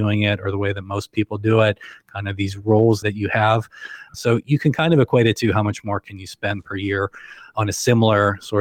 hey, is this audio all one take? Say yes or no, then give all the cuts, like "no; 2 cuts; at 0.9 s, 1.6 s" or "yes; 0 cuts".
no; 1 cut; at 4.1 s